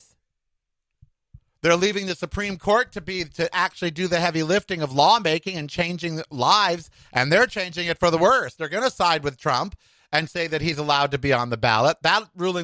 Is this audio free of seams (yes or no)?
yes